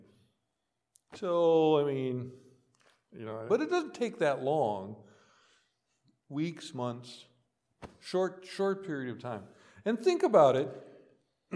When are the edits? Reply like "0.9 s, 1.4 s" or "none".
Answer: 3.5 s